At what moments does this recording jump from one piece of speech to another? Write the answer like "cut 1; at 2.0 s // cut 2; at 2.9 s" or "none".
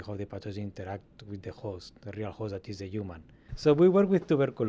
cut 1; at 3.5 s